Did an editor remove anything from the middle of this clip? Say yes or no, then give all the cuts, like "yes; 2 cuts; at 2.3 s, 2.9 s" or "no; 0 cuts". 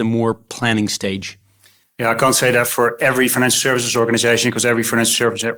no; 0 cuts